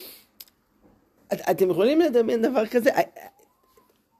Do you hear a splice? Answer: yes; 1 cut; at 1.2 s

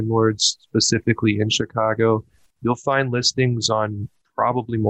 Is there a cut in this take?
yes; 1 cut; at 2.6 s

